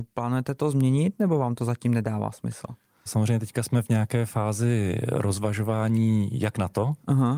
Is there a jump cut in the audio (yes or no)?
yes